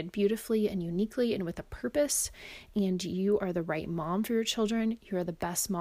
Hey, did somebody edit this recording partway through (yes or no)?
no